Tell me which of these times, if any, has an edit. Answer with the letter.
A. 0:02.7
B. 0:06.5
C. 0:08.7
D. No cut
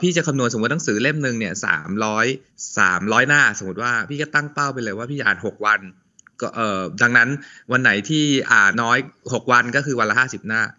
C